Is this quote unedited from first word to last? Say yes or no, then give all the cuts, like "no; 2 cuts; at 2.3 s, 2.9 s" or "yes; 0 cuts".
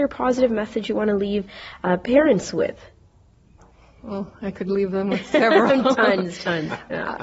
yes; 0 cuts